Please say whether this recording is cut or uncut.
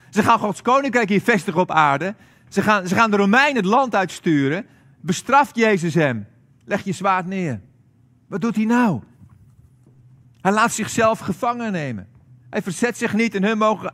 uncut